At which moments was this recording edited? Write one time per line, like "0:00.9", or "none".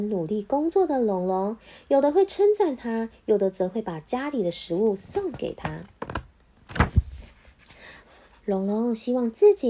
0:08.0